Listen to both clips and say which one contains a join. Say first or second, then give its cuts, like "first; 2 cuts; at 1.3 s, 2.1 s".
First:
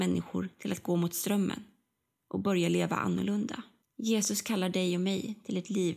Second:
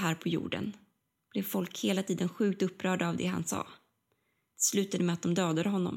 first; 1 cut; at 3.8 s